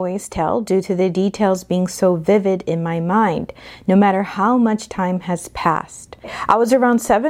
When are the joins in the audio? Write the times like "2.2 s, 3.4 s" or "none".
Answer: none

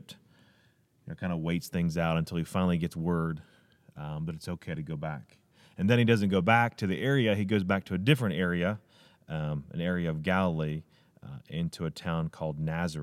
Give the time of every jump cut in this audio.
none

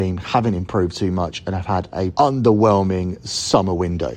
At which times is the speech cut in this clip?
2.1 s

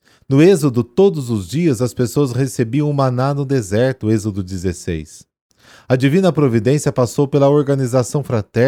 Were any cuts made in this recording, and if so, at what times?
none

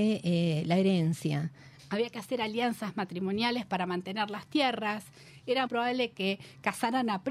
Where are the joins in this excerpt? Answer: 1.8 s, 5.7 s

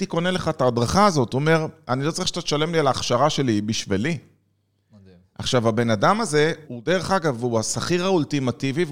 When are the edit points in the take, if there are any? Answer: 6.6 s

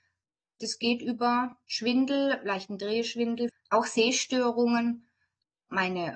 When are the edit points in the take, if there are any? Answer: 3.5 s

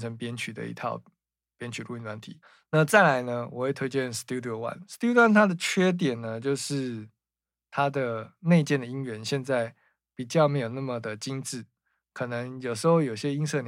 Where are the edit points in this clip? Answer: none

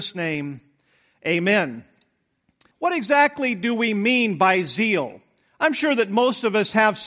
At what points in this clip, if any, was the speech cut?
2.7 s

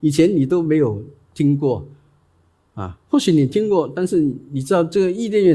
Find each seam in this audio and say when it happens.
none

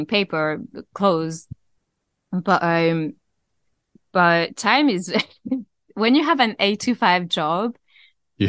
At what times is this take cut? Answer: none

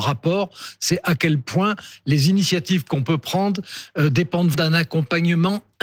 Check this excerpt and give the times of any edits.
4.5 s

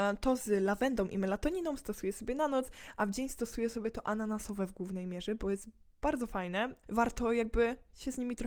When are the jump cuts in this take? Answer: 6.8 s

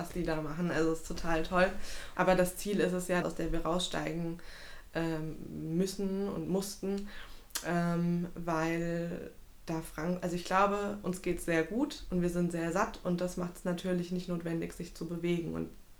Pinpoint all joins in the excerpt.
2.2 s, 3.2 s

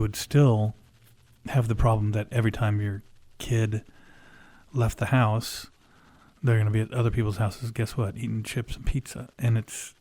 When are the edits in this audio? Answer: none

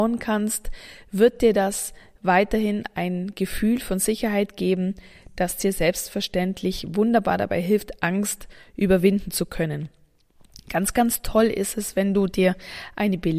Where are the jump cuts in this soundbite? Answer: none

